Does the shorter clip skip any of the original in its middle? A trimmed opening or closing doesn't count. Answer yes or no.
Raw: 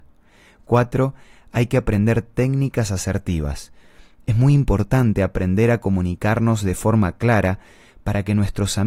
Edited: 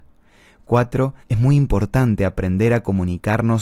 yes